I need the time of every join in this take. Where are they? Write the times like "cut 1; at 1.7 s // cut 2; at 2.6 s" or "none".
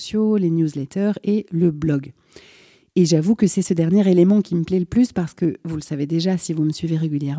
none